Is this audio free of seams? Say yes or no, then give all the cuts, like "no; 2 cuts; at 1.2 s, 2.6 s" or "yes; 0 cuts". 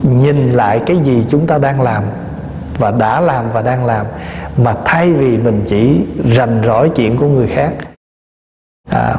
yes; 0 cuts